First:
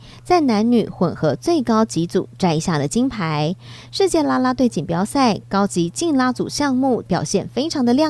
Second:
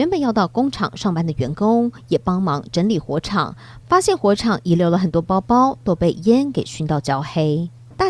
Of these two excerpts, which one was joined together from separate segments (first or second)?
first